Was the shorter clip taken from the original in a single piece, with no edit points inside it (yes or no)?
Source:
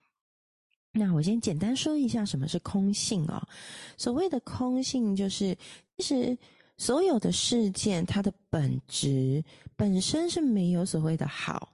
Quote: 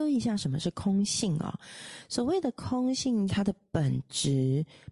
no